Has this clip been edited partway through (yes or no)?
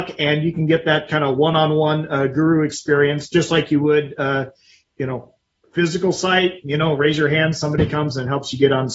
no